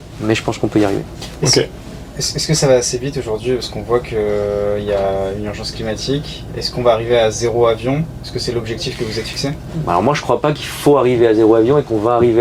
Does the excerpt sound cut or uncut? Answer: uncut